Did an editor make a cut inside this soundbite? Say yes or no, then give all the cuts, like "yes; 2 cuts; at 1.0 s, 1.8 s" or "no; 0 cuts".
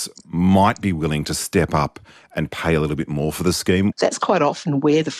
yes; 1 cut; at 3.9 s